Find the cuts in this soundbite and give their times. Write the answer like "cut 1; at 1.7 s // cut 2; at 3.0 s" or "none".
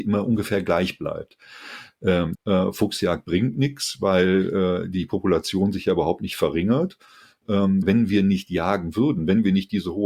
cut 1; at 2.3 s // cut 2; at 7.8 s